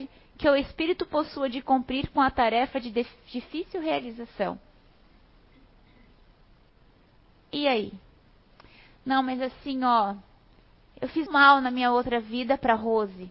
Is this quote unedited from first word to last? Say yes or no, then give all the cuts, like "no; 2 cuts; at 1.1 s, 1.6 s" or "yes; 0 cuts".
no; 1 cut; at 11.3 s